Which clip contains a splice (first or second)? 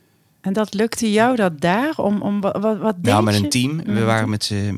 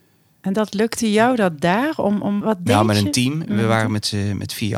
second